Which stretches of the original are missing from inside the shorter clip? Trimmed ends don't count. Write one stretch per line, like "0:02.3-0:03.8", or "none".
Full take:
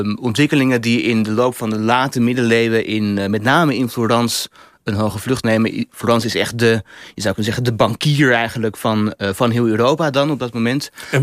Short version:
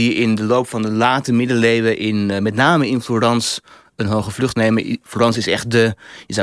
none